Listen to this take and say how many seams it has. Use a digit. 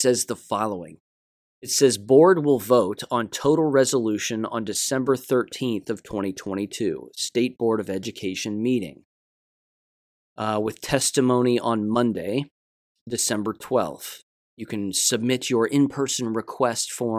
0